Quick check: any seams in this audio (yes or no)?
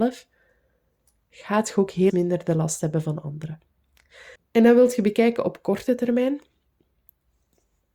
yes